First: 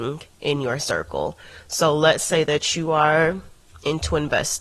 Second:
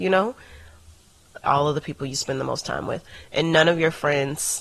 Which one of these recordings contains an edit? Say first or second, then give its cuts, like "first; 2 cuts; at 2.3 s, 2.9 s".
second; 1 cut; at 1.4 s